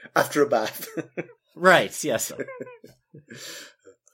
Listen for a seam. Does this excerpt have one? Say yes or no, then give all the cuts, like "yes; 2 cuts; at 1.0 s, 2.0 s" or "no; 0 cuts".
yes; 1 cut; at 2.3 s